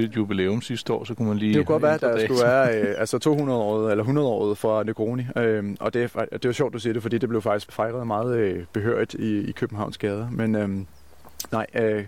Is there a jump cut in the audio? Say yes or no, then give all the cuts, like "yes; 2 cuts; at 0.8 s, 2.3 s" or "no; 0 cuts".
yes; 1 cut; at 7.7 s